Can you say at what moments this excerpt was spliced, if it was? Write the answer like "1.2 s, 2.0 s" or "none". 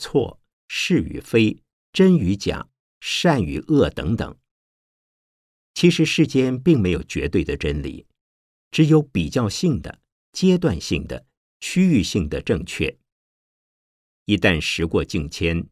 none